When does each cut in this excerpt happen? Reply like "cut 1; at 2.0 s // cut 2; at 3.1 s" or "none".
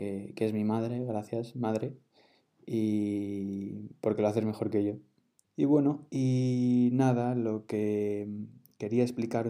cut 1; at 5.4 s